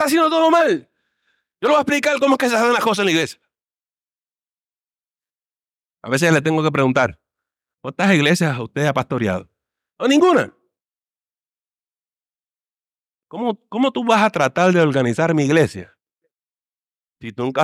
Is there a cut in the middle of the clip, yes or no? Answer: no